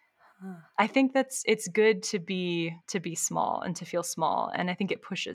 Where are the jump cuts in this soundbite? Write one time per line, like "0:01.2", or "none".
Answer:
0:02.8